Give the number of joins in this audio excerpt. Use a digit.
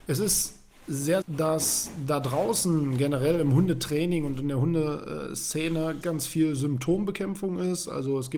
2